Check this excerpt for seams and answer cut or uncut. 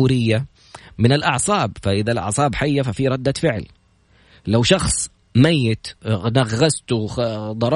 uncut